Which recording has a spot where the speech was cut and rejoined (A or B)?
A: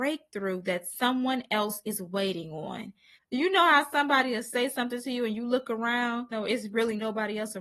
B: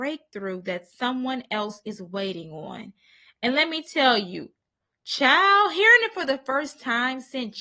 A